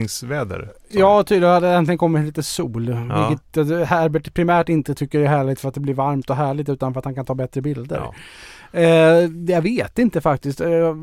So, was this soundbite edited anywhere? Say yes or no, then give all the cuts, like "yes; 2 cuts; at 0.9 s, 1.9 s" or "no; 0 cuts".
no; 0 cuts